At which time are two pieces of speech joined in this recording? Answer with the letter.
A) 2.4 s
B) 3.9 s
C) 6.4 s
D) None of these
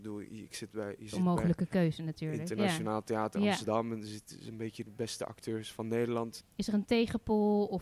C